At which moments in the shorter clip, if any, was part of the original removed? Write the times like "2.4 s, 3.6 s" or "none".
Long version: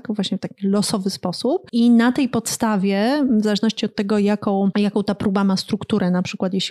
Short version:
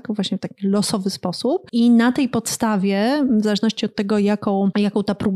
none